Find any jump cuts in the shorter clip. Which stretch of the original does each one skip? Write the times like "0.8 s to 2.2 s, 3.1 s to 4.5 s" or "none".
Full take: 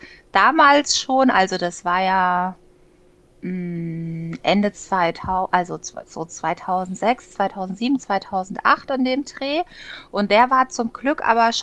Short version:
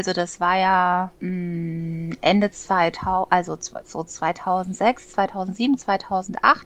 2.6 s to 3.4 s